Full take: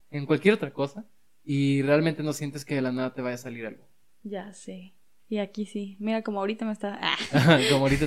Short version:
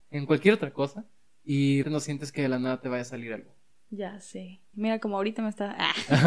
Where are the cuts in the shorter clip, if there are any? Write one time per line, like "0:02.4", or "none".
0:01.8
0:04.7